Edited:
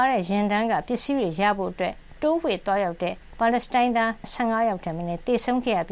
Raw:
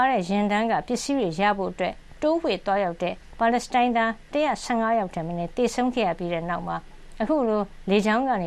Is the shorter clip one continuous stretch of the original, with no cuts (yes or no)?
no